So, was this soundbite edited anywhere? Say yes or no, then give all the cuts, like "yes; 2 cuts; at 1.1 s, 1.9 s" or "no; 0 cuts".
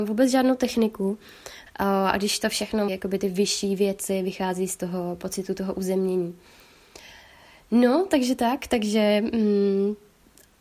yes; 2 cuts; at 1.7 s, 2.9 s